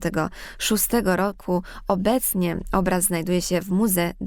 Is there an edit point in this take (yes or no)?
no